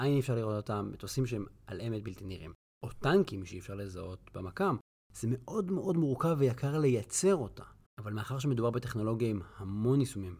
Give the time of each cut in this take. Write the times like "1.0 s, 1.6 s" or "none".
5.0 s, 7.9 s